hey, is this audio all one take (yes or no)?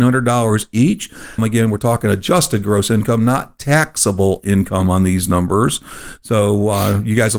no